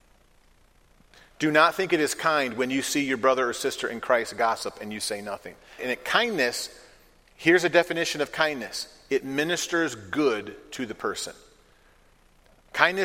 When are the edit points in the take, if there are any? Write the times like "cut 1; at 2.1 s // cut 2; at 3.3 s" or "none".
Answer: cut 1; at 5.8 s